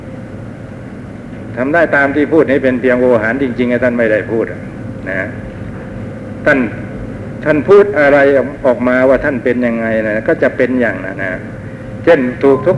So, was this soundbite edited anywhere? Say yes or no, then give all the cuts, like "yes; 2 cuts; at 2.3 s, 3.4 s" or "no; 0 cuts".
yes; 1 cut; at 11.1 s